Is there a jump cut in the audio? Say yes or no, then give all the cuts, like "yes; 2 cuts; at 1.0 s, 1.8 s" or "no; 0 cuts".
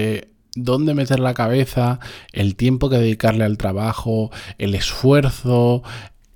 no; 0 cuts